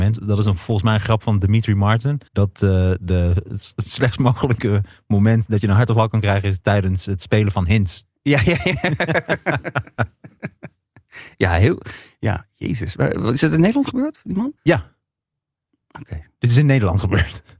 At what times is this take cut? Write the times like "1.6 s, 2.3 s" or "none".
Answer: 2.3 s, 14.6 s